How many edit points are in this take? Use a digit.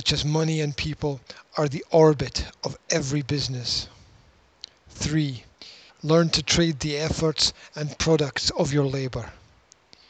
1